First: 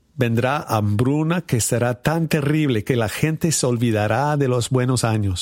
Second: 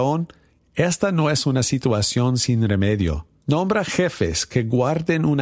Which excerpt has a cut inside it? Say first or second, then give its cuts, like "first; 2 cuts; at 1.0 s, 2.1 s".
second; 1 cut; at 3.4 s